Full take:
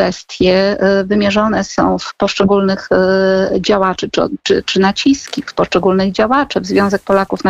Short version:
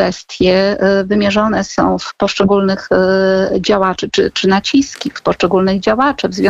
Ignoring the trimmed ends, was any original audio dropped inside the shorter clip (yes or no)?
yes